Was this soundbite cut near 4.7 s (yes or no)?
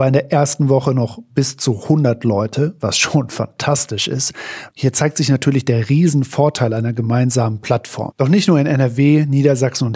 yes